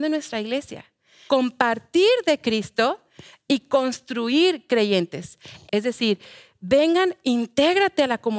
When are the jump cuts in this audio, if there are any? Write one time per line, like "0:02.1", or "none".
0:01.3
0:05.7